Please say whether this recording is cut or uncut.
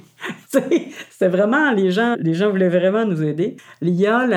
cut